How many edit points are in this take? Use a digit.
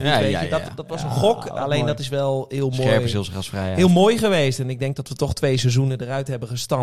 0